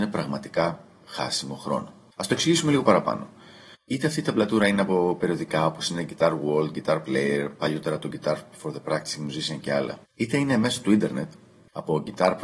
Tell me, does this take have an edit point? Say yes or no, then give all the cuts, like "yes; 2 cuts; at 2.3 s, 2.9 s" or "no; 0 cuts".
yes; 2 cuts; at 3.7 s, 10.0 s